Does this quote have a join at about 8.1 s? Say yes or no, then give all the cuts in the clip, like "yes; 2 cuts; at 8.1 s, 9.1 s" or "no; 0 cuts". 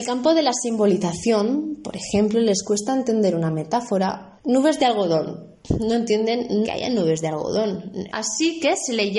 yes; 2 cuts; at 6.6 s, 8.1 s